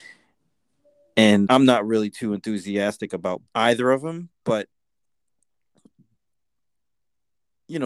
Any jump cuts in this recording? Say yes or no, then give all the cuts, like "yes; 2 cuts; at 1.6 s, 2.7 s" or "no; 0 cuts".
yes; 2 cuts; at 1.5 s, 3.5 s